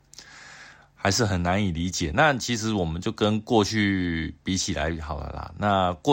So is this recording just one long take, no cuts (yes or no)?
yes